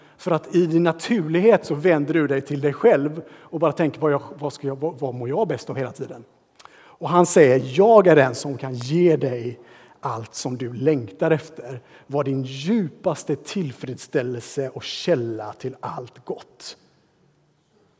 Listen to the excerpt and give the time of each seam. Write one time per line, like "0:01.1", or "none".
none